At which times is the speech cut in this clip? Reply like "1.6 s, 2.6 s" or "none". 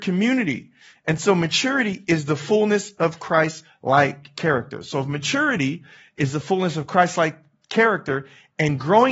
none